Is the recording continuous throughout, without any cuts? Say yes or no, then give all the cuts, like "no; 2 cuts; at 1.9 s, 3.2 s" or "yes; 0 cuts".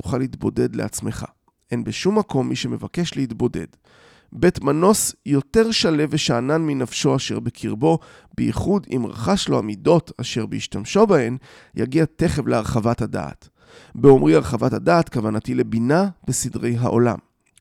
yes; 0 cuts